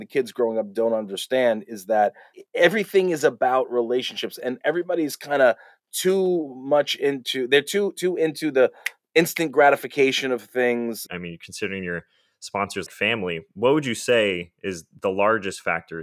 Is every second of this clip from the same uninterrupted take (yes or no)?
no